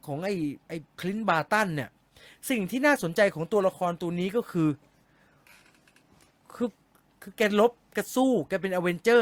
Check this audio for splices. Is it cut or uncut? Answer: cut